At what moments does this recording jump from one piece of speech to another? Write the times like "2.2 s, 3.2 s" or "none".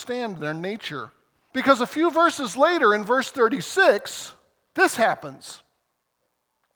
1.5 s